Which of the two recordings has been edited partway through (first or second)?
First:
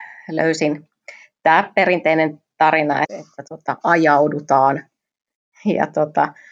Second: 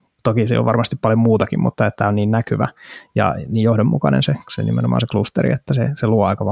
first